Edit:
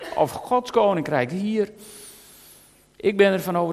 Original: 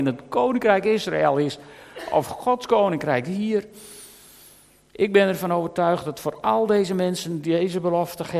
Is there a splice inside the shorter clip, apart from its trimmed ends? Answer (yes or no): no